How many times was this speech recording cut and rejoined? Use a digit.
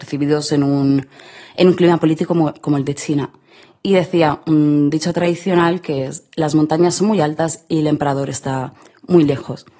0